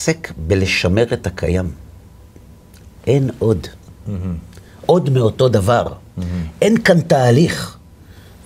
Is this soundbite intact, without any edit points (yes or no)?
yes